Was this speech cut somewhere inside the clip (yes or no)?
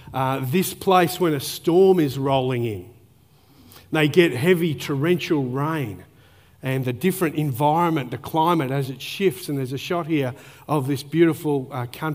no